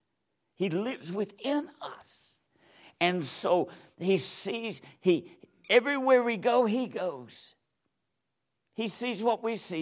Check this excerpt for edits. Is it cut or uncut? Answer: uncut